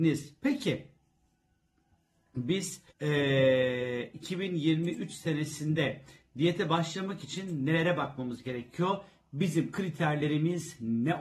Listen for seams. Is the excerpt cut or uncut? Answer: cut